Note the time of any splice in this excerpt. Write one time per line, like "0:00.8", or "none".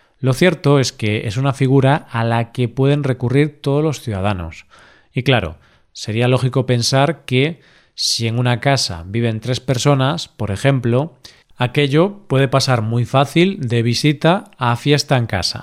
0:11.4